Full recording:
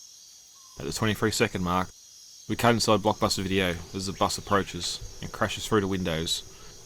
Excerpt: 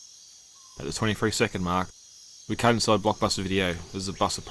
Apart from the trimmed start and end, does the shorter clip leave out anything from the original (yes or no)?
no